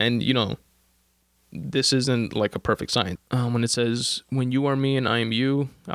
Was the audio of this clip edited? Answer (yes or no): yes